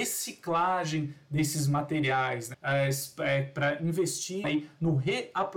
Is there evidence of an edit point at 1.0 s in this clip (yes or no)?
no